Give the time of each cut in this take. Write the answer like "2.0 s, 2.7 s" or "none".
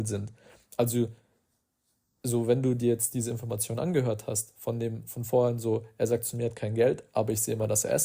none